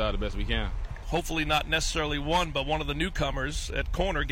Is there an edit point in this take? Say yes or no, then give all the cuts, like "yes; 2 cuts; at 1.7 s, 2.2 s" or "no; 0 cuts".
yes; 1 cut; at 1.0 s